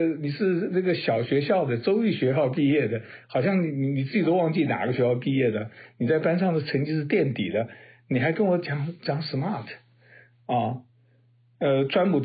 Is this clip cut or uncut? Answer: uncut